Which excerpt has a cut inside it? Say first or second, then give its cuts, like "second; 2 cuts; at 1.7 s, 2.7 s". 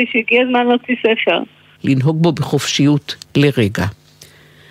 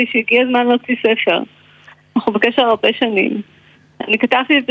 first; 2 cuts; at 1.8 s, 3.2 s